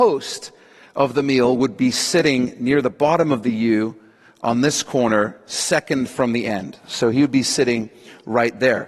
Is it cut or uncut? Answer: uncut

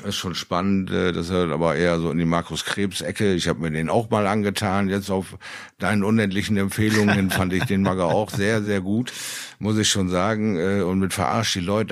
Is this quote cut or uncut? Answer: uncut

